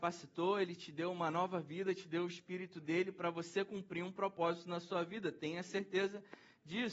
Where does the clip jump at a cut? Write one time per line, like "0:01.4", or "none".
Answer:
none